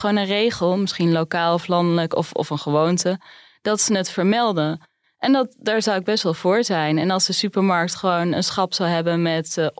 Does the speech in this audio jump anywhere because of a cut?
no; 0 cuts

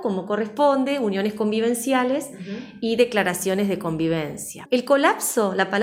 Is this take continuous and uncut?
no; 1 cut; at 4.7 s

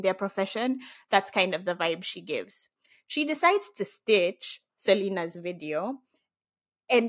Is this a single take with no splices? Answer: yes; 0 cuts

